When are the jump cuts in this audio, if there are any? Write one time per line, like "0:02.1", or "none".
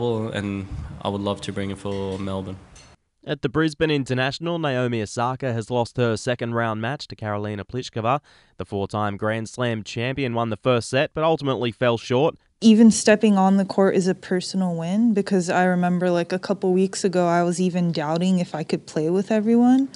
0:12.5

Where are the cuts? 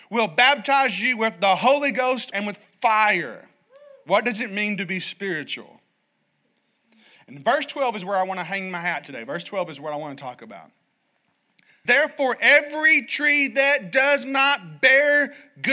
0:02.3
0:11.9

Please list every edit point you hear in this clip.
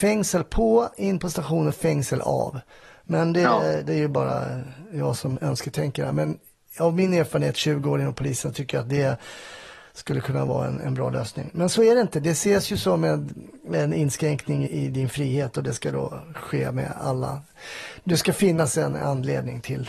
0:14.7

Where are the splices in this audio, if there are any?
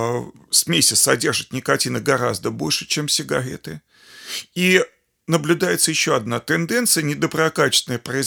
none

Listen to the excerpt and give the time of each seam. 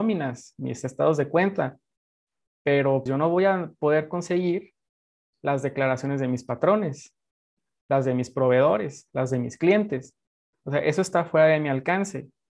0:03.1

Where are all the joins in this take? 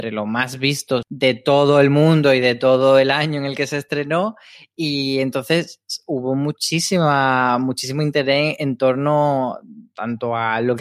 0:01.0

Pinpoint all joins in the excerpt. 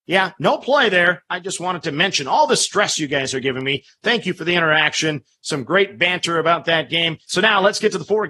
0:07.3

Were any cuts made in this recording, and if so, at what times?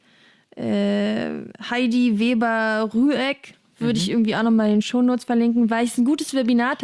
none

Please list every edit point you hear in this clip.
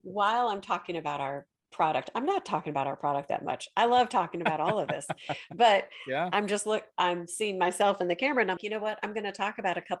0:08.6

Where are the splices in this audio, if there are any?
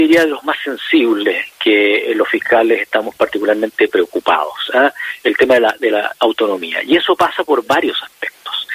none

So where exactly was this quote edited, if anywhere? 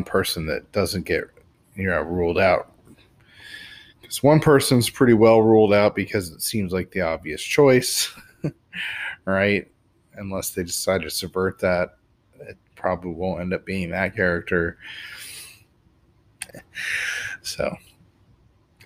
0:16.5

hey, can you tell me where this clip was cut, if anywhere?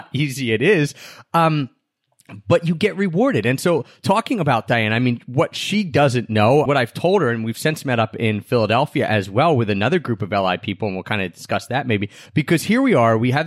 0:06.7
0:12.3

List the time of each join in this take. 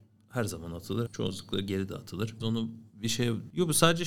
0:01.1
0:02.4

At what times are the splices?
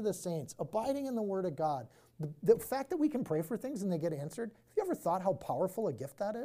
none

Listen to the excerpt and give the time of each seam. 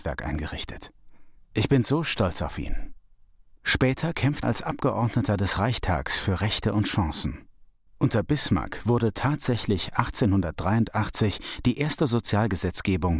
0:04.4

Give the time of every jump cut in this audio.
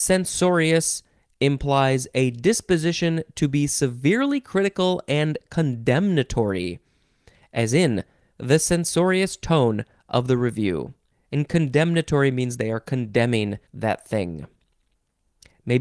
0:11.1
0:13.7

